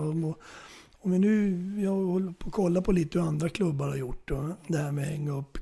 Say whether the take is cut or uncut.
uncut